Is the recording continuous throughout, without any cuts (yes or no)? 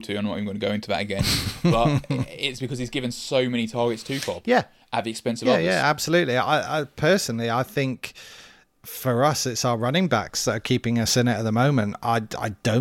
yes